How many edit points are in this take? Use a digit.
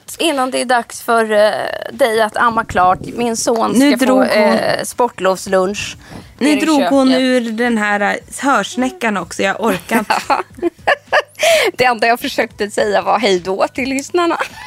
0